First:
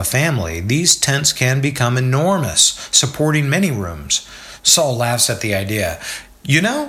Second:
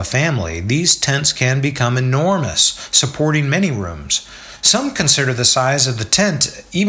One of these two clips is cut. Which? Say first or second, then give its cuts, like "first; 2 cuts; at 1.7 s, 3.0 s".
first; 1 cut; at 4.6 s